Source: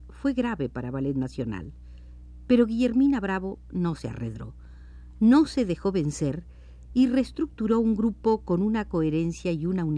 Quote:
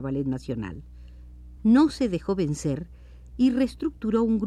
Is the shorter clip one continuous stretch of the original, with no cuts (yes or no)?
no